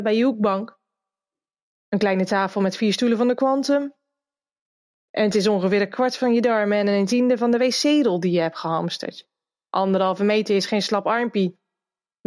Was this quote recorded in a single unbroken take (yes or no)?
yes